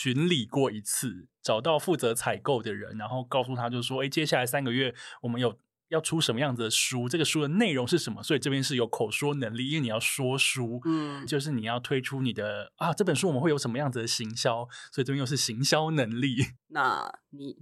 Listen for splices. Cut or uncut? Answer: cut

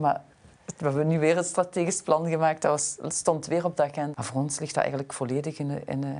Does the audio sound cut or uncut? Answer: cut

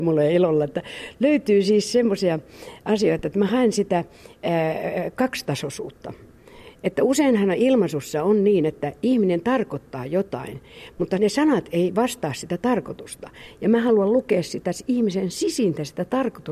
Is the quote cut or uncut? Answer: uncut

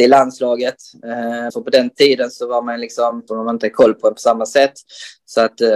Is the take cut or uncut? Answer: cut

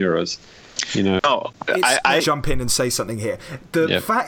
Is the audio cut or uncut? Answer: cut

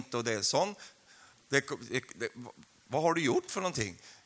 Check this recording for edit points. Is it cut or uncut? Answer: cut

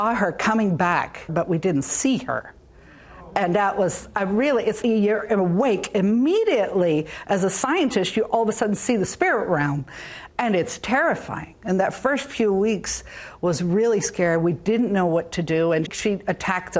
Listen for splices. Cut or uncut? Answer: cut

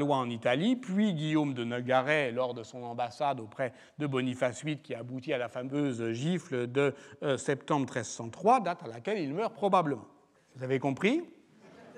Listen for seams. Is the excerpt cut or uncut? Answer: cut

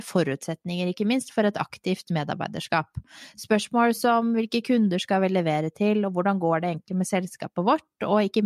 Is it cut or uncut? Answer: uncut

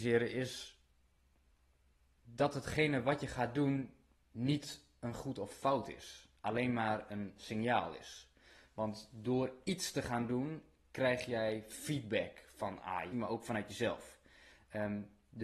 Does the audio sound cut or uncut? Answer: cut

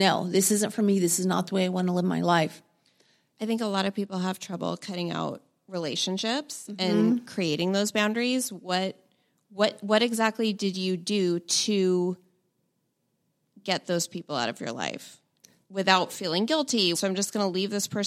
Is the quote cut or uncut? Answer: cut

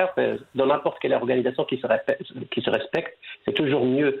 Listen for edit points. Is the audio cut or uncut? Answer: uncut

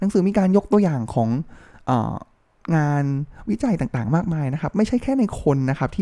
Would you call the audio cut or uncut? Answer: uncut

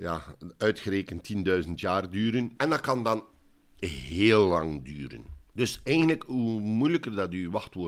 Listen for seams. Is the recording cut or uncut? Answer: cut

